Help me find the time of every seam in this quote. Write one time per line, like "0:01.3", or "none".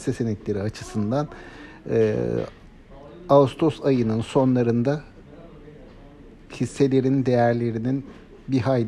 none